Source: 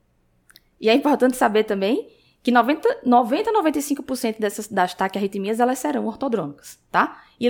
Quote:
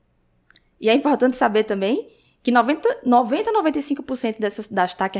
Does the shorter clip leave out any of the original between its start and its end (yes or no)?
no